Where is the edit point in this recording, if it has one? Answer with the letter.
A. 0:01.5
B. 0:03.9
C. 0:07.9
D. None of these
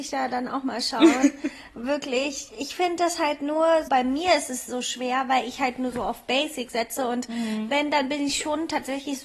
B